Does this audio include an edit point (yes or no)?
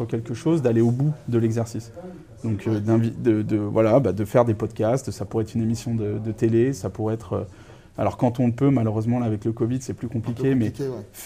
no